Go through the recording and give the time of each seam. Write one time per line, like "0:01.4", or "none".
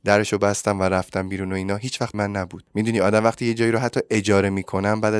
0:02.1

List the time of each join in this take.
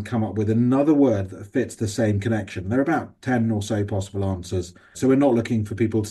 none

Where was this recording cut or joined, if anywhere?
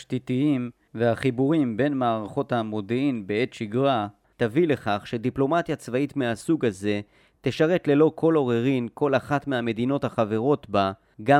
none

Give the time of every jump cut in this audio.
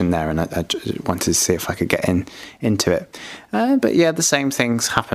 none

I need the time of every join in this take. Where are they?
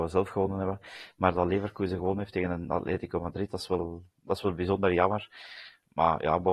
none

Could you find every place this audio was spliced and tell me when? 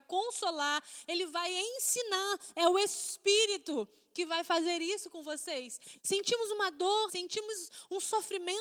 0:06.0
0:07.1

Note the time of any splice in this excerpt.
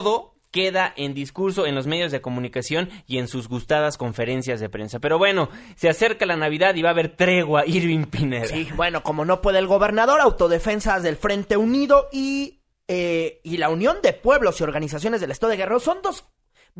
none

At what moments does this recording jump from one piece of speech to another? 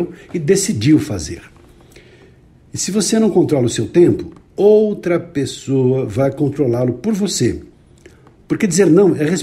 0:04.5

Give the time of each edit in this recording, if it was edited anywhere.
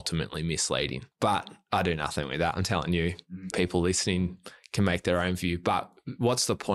0:01.1
0:03.5

